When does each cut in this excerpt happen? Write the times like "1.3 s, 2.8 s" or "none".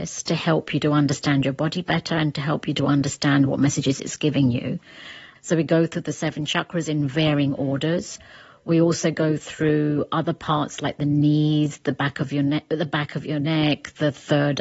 5.4 s